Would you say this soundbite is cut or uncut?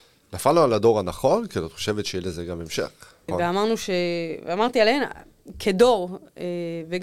cut